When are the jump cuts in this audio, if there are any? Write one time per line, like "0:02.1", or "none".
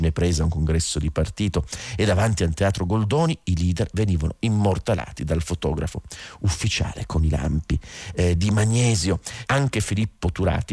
0:09.4